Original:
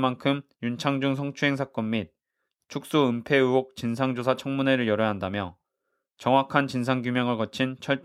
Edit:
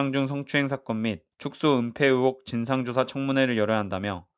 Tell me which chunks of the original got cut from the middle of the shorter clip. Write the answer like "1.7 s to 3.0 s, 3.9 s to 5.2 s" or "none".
2.2 s to 2.6 s